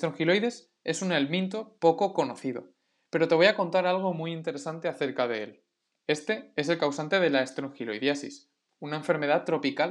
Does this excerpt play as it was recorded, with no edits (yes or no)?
no